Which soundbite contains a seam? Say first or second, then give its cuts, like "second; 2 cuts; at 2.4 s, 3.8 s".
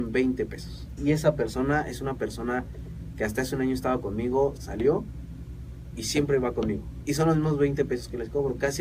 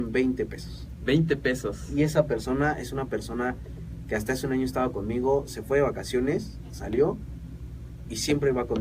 first; 3 cuts; at 1.0 s, 4.6 s, 7.0 s